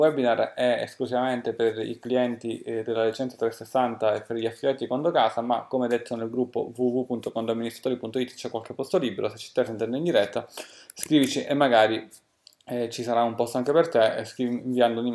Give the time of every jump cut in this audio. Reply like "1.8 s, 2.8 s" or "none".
none